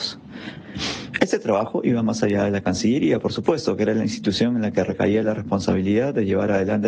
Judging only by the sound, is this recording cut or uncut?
uncut